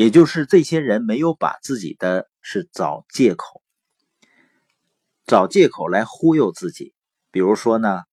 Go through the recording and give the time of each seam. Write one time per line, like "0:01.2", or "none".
0:02.4